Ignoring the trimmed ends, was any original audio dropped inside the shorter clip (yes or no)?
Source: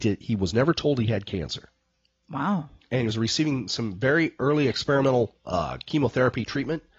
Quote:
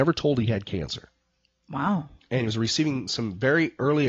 no